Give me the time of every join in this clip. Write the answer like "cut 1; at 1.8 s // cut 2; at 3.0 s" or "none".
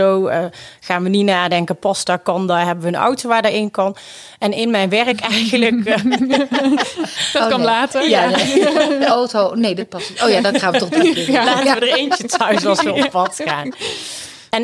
none